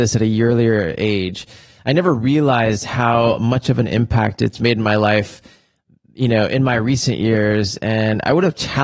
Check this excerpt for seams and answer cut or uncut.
uncut